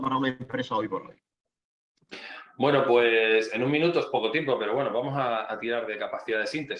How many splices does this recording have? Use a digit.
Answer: 0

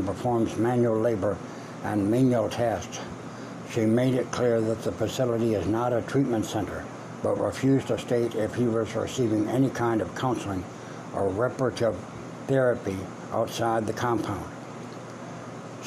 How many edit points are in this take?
0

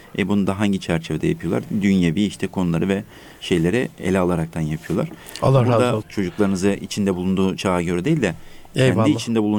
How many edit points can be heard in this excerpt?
1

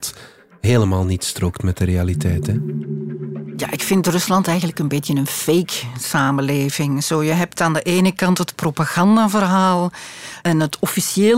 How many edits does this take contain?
0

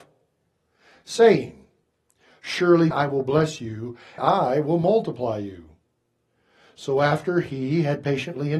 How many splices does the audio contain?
2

